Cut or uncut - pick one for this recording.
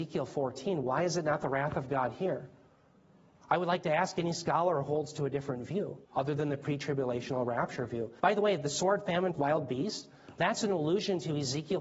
cut